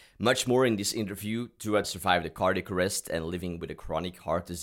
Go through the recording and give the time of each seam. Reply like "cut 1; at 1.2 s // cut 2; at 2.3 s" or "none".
cut 1; at 1.8 s